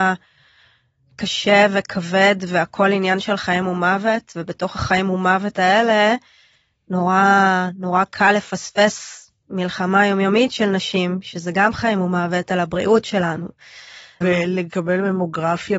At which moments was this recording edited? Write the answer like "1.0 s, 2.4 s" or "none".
14.2 s